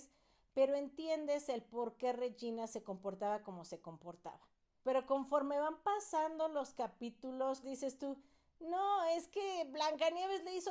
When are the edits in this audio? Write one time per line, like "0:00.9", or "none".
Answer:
0:04.8
0:07.6